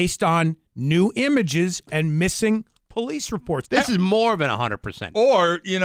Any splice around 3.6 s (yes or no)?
yes